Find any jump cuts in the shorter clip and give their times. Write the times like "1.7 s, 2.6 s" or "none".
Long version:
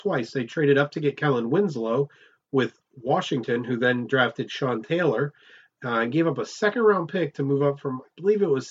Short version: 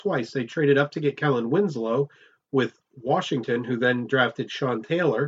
none